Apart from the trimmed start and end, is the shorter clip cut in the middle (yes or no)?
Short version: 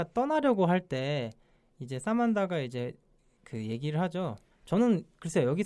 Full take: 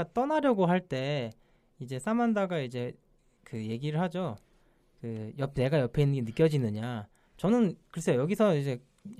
yes